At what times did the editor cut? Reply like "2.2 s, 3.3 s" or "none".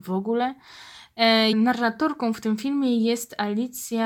1.5 s